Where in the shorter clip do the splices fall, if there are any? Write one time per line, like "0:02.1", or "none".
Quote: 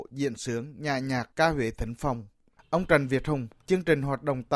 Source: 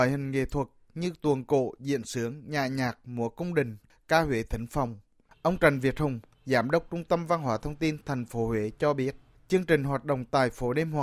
0:01.3
0:03.6